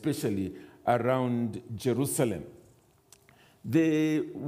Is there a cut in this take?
no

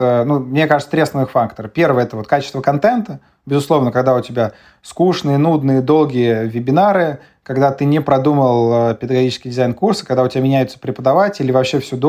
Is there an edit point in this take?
no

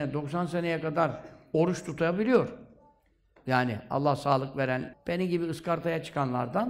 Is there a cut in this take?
yes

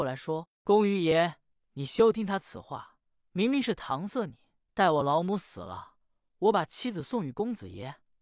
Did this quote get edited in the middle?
yes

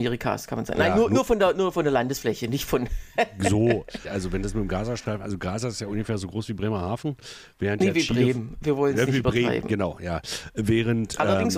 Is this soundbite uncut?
no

